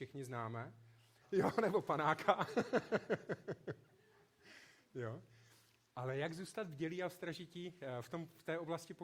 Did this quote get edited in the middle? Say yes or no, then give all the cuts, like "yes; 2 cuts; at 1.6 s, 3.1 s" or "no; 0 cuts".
yes; 1 cut; at 1.2 s